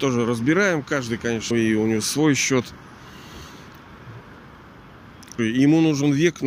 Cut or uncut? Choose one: cut